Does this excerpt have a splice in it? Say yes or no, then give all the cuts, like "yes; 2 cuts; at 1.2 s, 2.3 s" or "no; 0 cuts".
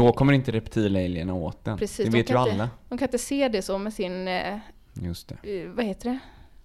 no; 0 cuts